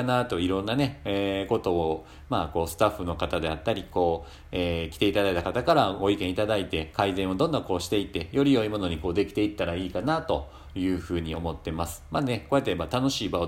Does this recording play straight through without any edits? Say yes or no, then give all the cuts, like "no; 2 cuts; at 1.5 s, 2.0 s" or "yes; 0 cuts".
yes; 0 cuts